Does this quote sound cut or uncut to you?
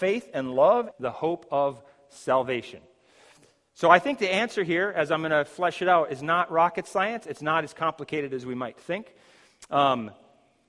cut